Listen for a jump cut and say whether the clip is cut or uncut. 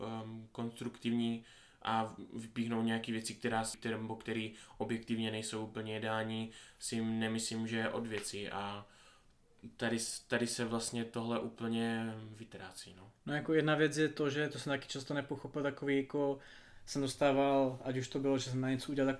cut